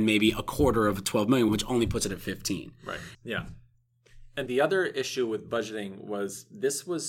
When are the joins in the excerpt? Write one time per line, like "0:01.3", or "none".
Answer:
0:01.5
0:03.1
0:04.5